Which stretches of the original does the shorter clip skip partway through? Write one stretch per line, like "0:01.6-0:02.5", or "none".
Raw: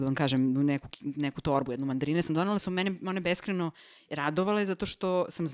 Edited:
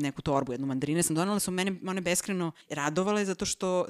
0:03.8-0:04.0

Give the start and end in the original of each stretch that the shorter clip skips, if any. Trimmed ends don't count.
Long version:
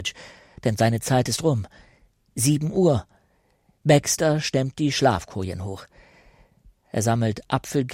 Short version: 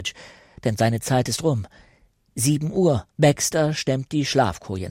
0:03.1-0:03.8

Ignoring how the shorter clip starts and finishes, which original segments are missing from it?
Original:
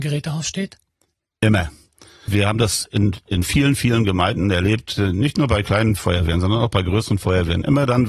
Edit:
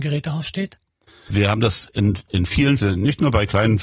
0:01.1-0:02.0
0:03.8-0:05.0

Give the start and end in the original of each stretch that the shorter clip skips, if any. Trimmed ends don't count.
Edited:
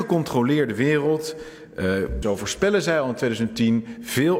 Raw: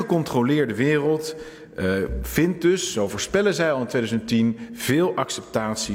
0:02.2-0:02.9

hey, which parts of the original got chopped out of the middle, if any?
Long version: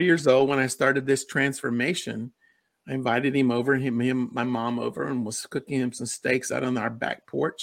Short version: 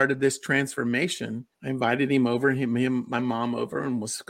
0:02.4-0:02.8

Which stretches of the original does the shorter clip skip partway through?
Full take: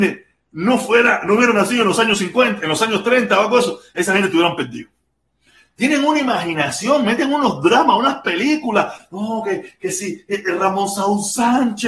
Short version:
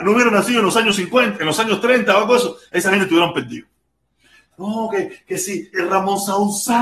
0:05.7-0:09.0
0:10.3-0:10.4

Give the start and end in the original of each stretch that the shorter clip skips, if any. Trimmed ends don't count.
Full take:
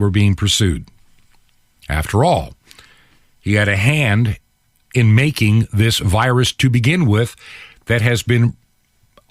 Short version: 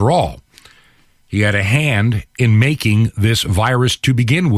0:04.4-0:04.9

